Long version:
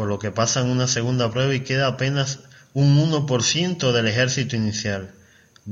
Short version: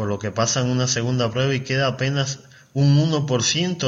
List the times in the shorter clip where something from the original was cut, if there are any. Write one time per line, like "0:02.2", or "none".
none